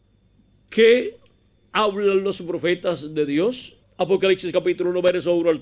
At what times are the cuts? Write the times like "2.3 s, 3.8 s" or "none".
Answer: 3.8 s

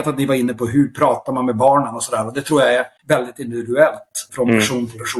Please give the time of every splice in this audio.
3.0 s, 4.3 s

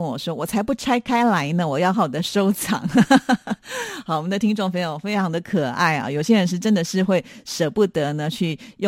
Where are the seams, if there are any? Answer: 1.9 s

